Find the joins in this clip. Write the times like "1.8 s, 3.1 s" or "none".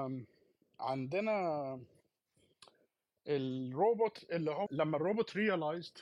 4.7 s